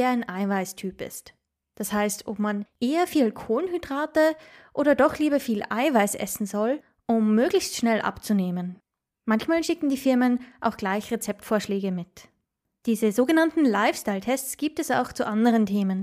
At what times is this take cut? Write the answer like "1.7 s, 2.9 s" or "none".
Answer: none